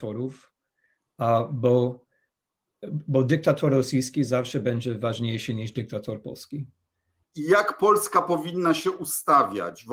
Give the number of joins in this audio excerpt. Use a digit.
1